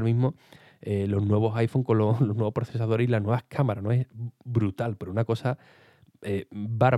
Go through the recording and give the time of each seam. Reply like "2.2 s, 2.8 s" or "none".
none